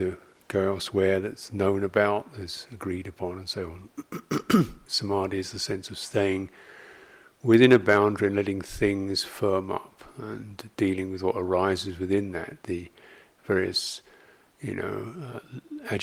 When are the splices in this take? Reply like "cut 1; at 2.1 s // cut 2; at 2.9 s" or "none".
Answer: cut 1; at 4.9 s